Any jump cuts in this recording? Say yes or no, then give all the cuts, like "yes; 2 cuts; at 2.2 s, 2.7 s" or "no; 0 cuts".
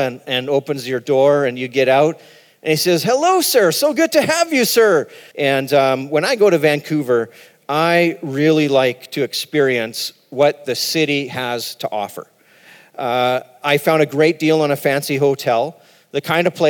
yes; 1 cut; at 5.3 s